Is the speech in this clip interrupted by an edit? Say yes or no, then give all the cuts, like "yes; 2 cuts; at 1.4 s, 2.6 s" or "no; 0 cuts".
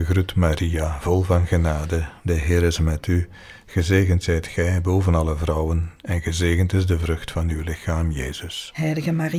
no; 0 cuts